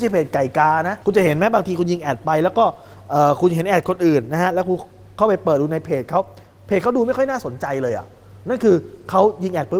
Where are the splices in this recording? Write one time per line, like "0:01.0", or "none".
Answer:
0:01.0